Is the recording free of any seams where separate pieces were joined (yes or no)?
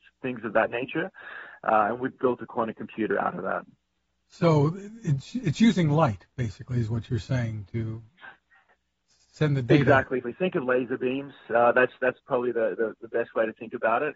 no